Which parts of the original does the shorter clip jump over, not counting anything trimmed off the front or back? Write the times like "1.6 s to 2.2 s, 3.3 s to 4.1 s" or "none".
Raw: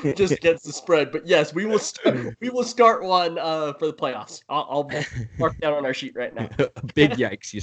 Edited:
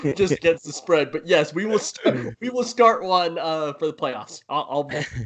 none